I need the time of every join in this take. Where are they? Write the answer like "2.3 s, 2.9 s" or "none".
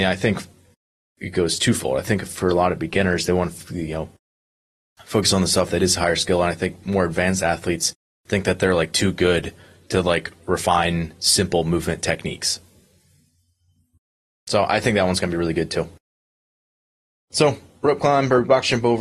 none